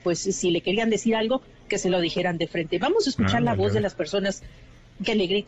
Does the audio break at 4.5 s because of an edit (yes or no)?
no